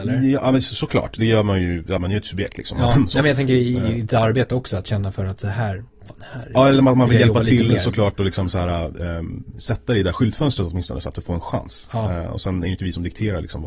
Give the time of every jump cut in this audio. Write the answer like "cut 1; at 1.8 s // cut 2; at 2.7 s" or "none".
cut 1; at 2.0 s